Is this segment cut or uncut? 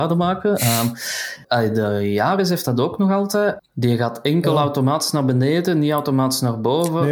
cut